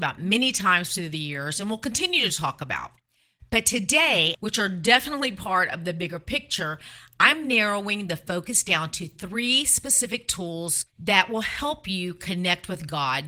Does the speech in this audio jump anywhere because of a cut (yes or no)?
yes